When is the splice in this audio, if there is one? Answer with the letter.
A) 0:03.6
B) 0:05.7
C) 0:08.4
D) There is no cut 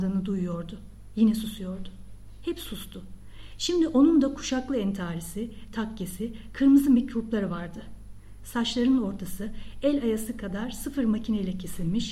B